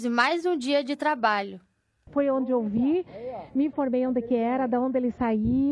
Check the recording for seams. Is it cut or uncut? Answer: cut